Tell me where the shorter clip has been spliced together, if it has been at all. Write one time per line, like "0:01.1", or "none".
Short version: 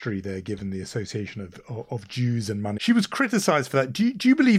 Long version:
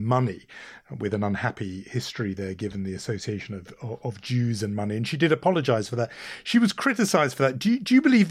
0:02.8